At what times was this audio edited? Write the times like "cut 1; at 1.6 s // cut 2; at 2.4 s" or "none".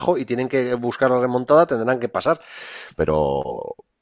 cut 1; at 2.9 s